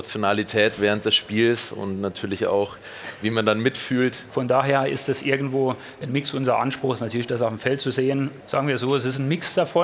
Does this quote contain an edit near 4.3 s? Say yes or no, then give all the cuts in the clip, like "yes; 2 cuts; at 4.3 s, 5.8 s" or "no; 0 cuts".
yes; 2 cuts; at 4.3 s, 8.4 s